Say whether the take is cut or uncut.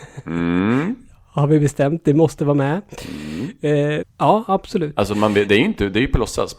cut